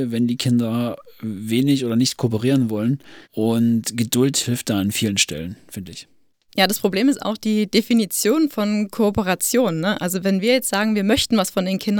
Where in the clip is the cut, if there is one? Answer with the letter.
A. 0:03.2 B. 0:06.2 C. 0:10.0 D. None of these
A